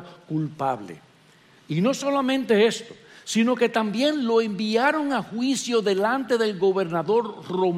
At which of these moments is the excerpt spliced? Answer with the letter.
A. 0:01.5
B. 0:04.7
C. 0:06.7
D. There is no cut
D